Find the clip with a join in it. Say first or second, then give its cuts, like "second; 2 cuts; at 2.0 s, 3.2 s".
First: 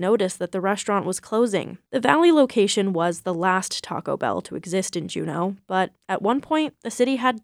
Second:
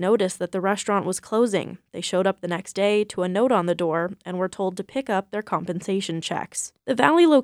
first; 1 cut; at 1.9 s